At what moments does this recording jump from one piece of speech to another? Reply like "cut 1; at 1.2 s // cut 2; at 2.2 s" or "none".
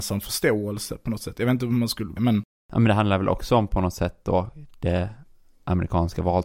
cut 1; at 2.2 s